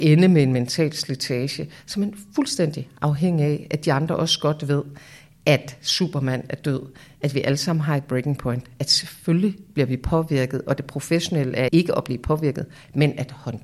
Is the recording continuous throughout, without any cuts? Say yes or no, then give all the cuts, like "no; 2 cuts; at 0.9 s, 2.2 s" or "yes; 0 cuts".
no; 1 cut; at 11.7 s